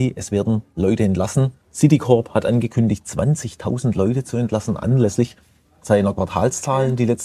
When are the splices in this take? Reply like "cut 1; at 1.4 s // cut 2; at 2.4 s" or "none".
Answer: cut 1; at 1.6 s